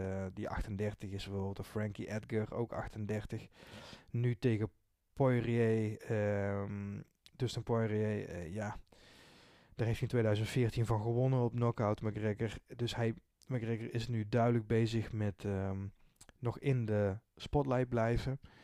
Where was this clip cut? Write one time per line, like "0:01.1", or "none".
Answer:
none